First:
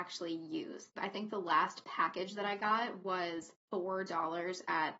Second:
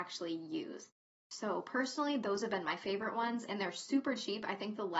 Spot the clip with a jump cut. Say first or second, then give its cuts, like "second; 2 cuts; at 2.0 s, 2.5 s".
first; 2 cuts; at 1.0 s, 3.7 s